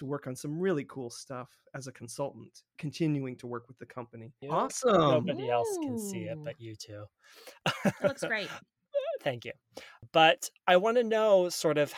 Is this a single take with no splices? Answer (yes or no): no